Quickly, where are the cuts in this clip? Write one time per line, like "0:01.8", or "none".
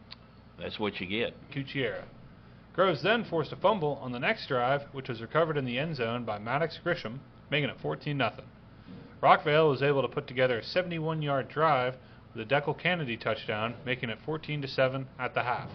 0:01.5